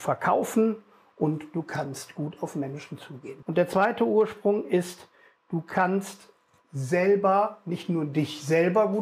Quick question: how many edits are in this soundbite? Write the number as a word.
one